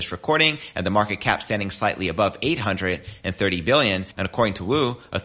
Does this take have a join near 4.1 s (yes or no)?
yes